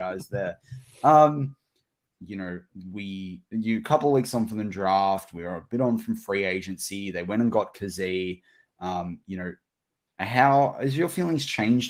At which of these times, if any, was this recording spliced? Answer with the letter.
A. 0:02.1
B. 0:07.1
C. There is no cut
A